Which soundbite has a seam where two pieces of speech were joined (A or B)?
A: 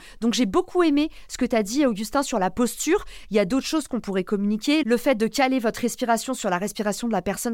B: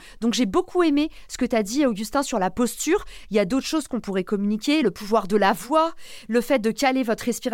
A